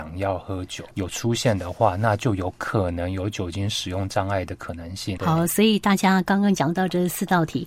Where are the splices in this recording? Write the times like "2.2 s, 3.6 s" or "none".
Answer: 0.9 s, 5.2 s